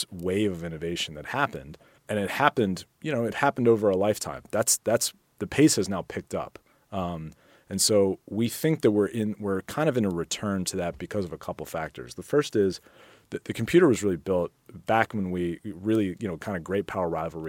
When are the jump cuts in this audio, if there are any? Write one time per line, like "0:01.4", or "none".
0:02.0